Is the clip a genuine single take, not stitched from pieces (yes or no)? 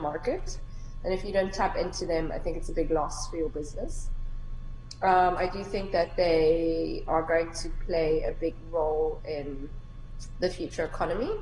yes